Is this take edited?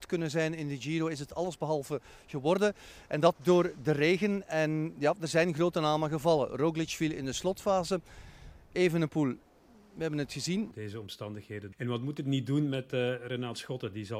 yes; 2 cuts; at 10.7 s, 11.7 s

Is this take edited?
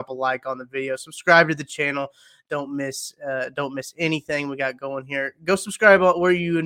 no; 0 cuts

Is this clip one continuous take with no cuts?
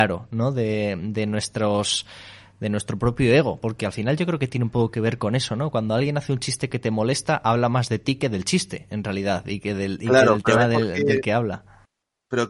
yes; 0 cuts

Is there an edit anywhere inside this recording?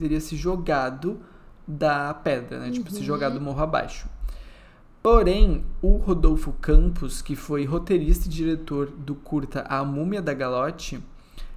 no; 0 cuts

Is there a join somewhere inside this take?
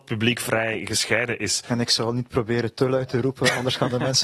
no; 0 cuts

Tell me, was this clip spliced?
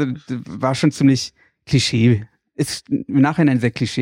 no; 0 cuts

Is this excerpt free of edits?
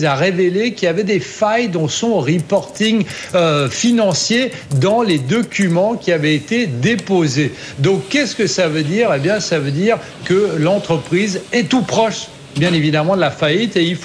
yes; 0 cuts

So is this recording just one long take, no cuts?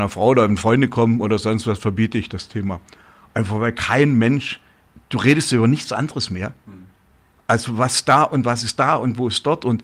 yes; 0 cuts

